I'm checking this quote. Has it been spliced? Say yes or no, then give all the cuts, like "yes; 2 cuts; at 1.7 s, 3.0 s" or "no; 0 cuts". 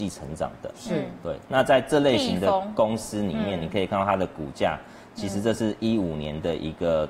no; 0 cuts